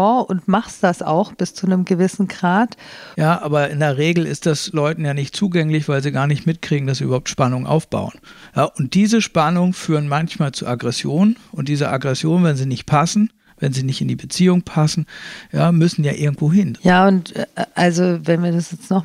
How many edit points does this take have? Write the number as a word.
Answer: two